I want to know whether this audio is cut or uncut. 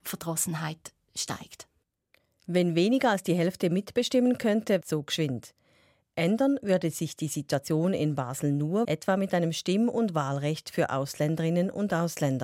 cut